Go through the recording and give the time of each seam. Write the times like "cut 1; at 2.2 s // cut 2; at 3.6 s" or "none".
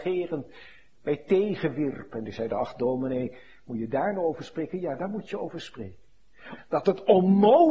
cut 1; at 6.6 s